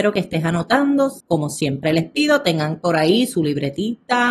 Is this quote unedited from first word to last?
no; 1 cut; at 1.2 s

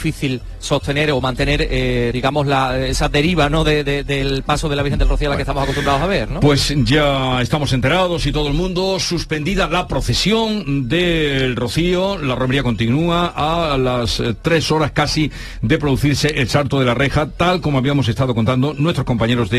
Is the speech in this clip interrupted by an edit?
yes; 1 cut; at 2.1 s

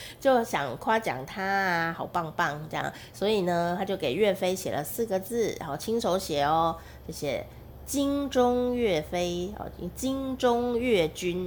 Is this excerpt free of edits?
yes; 0 cuts

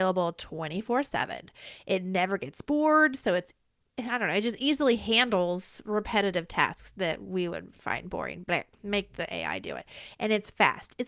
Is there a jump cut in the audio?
no; 0 cuts

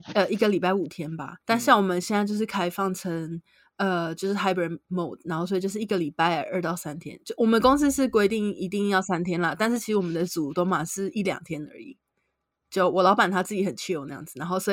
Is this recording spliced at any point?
yes; 1 cut; at 1.4 s

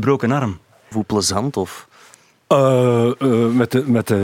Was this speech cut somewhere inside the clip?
yes; 1 cut; at 0.9 s

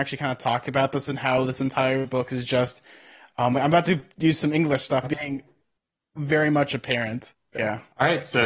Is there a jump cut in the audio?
yes; 2 cuts; at 5.0 s, 7.5 s

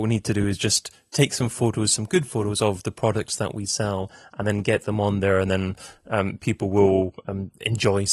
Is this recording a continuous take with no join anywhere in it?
yes; 0 cuts

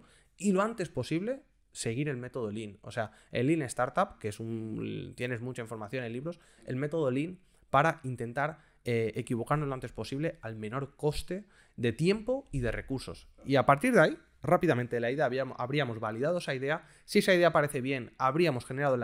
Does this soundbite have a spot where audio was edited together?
no; 0 cuts

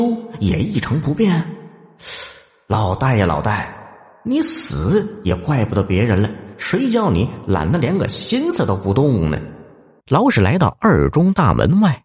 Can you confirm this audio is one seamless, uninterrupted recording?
no; 1 cut; at 10.0 s

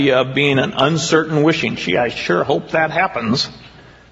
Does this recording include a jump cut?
no; 0 cuts

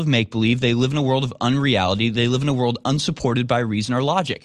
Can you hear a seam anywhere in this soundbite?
no; 0 cuts

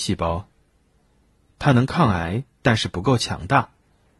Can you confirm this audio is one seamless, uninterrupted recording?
no; 1 cut; at 1.5 s

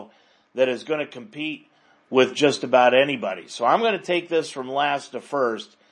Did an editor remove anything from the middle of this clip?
no; 0 cuts

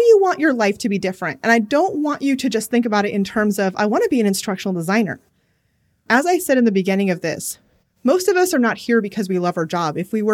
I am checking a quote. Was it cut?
yes; 1 cut; at 6.1 s

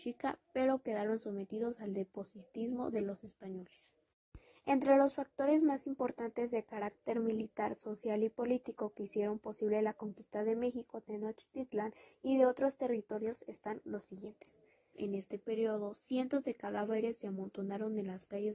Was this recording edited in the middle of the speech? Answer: yes; 1 cut; at 14.9 s

